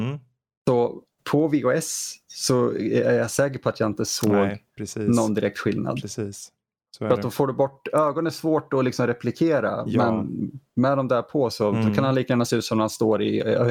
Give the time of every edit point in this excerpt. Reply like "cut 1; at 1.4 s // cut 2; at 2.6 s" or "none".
cut 1; at 1.2 s